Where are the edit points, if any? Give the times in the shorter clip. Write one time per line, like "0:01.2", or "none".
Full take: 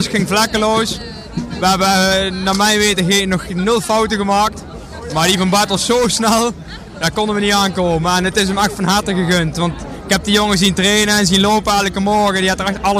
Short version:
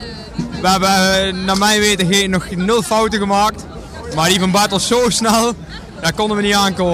none